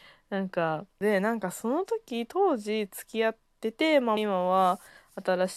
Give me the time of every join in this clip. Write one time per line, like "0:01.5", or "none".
0:00.9
0:04.2